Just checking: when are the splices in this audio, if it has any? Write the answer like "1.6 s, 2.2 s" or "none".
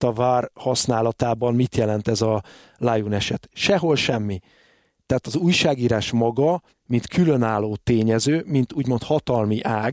6.7 s

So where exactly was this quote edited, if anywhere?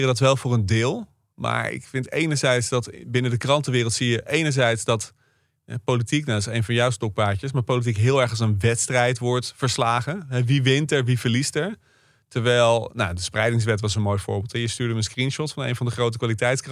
none

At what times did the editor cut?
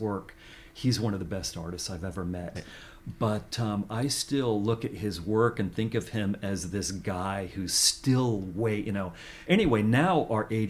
2.6 s, 9.4 s

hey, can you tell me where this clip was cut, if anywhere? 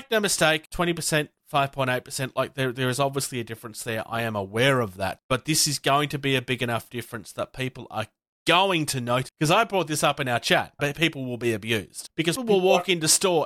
9.3 s, 10.8 s, 12.4 s

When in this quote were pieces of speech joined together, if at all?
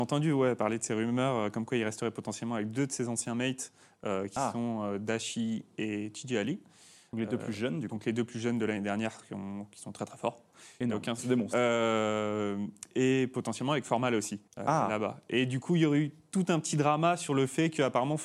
11.2 s, 14.5 s

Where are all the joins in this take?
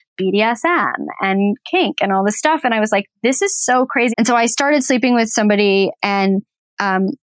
4.1 s

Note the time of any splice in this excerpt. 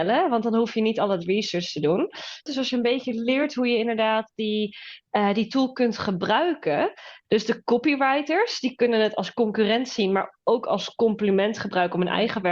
2.5 s, 7.2 s

